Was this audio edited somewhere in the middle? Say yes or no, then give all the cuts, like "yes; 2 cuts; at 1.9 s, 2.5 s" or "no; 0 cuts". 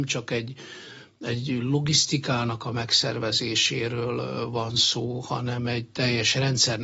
no; 0 cuts